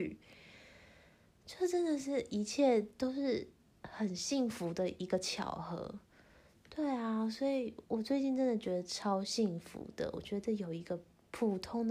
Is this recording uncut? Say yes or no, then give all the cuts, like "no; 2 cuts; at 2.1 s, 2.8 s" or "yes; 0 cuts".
yes; 0 cuts